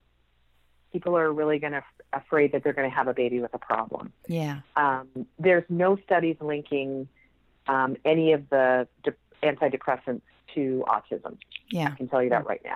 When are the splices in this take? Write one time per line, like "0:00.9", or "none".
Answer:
none